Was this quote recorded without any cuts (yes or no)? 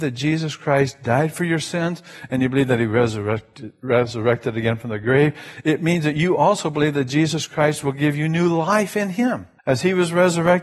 no